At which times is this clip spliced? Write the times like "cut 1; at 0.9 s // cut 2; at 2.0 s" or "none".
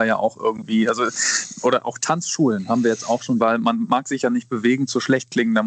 cut 1; at 3.4 s